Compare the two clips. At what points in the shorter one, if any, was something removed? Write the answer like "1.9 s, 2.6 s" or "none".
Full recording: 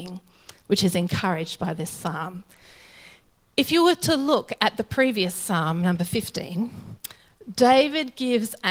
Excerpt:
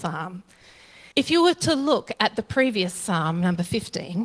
1.1 s